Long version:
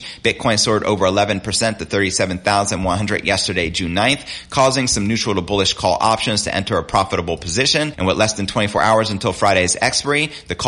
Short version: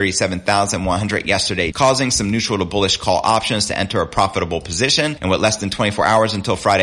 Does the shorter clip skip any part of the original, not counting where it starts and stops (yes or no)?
yes